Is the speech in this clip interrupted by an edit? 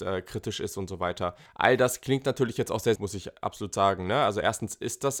yes; 2 cuts; at 1.5 s, 3.0 s

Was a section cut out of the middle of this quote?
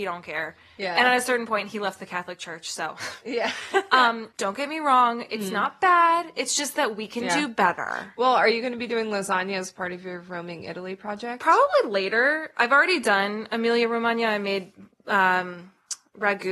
yes; 1 cut; at 4.3 s

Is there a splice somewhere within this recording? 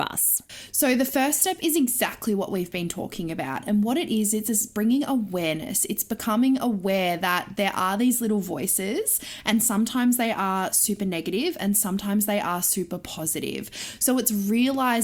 no; 0 cuts

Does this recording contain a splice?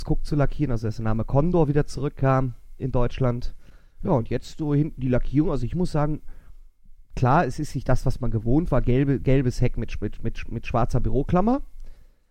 no; 0 cuts

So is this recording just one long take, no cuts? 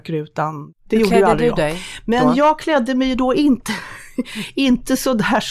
yes; 0 cuts

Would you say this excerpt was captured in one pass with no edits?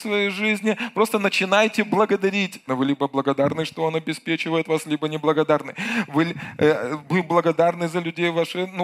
no; 1 cut; at 2.7 s

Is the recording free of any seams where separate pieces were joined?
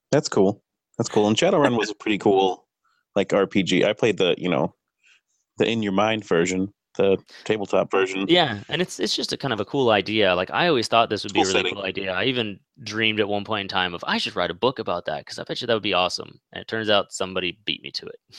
yes; 0 cuts

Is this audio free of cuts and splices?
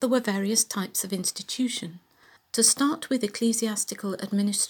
no; 1 cut; at 2.4 s

